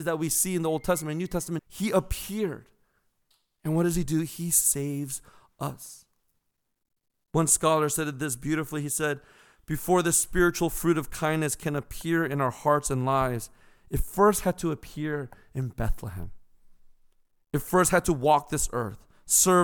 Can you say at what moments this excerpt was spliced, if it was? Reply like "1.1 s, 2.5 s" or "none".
1.6 s